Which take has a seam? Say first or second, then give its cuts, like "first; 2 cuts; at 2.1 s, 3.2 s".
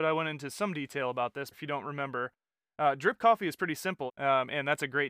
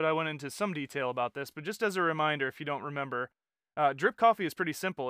first; 2 cuts; at 1.5 s, 4.1 s